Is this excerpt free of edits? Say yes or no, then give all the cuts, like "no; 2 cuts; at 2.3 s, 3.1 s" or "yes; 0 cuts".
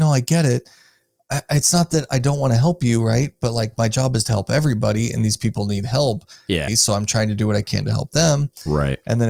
no; 1 cut; at 6.7 s